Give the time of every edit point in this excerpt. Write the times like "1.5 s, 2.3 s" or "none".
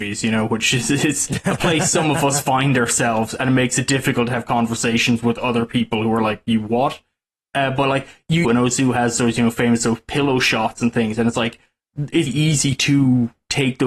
8.4 s, 12.3 s